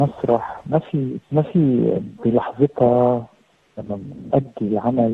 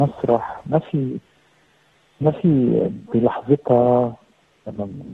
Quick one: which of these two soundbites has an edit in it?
first; 1 cut; at 1.2 s

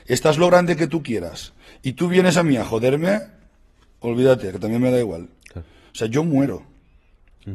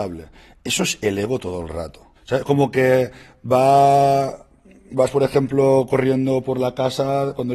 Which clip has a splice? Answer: second; 1 cut; at 2.2 s

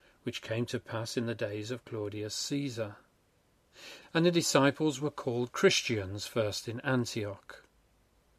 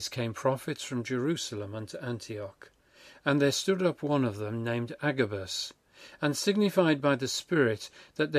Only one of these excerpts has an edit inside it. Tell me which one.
first; 1 cut; at 4.0 s

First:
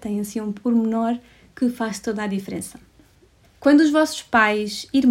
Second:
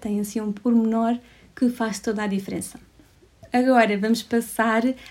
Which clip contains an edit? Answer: first; 1 cut; at 3.4 s

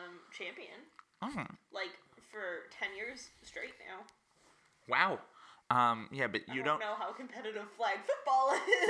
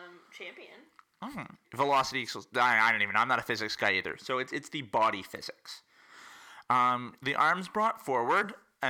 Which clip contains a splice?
second; 1 cut; at 1.6 s

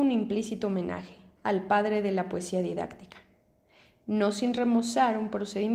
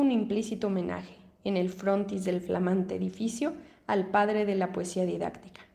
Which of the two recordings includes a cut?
first; 1 cut; at 1.4 s

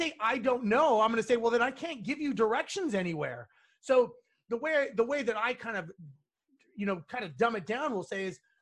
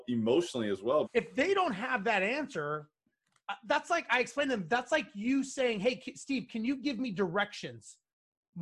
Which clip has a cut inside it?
second; 1 cut; at 1.0 s

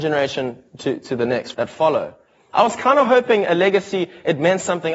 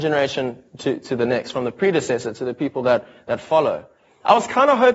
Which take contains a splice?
first; 1 cut; at 1.5 s

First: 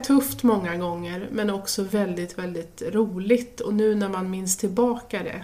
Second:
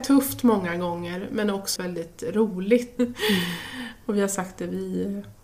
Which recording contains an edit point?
second; 2 cuts; at 1.8 s, 3.0 s

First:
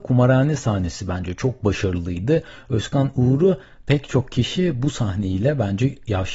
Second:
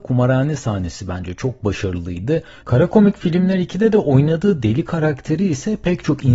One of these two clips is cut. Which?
second; 1 cut; at 2.6 s

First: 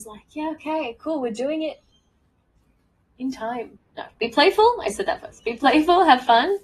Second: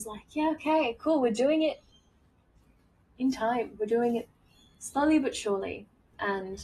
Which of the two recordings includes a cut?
first; 1 cut; at 3.8 s

